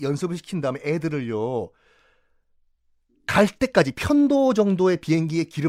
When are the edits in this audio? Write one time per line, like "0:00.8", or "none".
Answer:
none

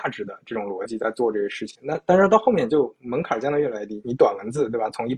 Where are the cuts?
0:04.0

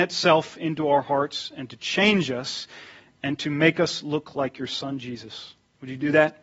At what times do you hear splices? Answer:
none

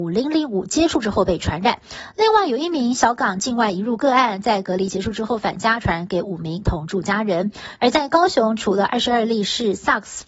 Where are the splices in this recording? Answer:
0:07.8

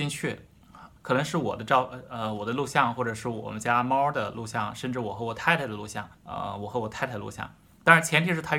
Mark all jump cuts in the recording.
0:01.0
0:06.1

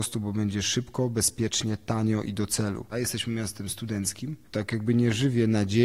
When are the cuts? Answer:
0:02.9
0:04.5

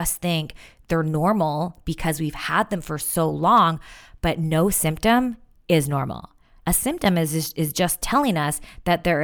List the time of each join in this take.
0:06.6

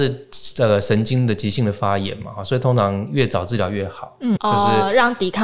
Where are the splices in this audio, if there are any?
0:04.4

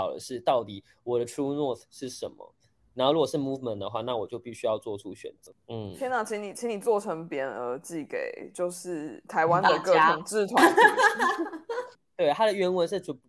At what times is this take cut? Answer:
none

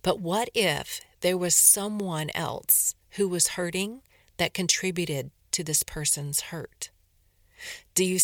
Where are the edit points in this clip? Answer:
none

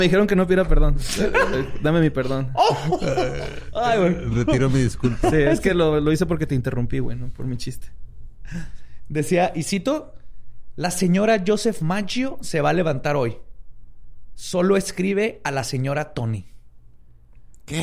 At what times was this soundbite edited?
none

